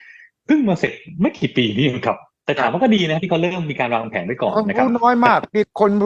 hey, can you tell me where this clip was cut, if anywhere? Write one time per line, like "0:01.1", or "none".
none